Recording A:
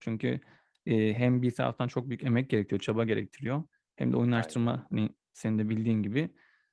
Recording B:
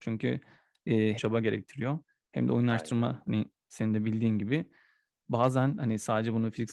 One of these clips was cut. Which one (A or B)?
B